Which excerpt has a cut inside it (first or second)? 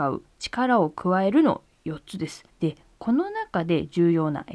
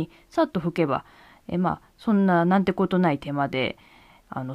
first